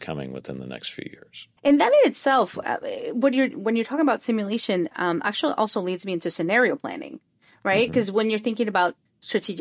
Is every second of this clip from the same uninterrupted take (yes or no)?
no